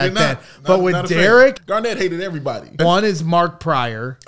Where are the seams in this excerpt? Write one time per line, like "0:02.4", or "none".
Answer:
0:01.6
0:02.8